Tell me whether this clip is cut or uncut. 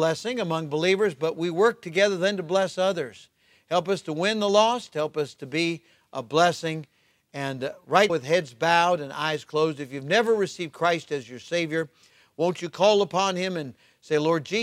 cut